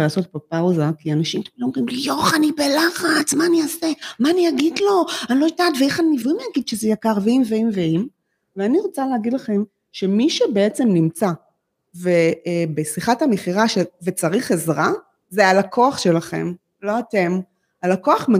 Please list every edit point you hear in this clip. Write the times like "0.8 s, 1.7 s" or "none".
6.2 s